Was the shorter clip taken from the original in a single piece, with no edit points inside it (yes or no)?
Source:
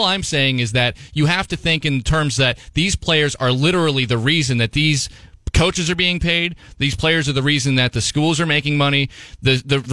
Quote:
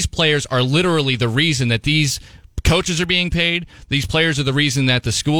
yes